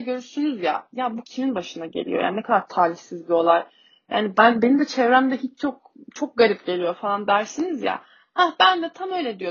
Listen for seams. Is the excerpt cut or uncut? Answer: uncut